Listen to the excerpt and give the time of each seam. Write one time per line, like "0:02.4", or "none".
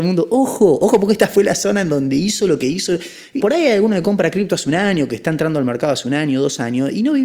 0:03.4